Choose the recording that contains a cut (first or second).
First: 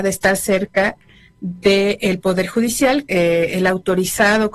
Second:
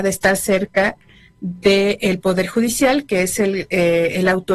first